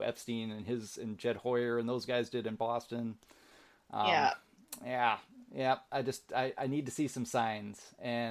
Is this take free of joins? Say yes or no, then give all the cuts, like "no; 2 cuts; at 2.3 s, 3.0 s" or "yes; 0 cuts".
yes; 0 cuts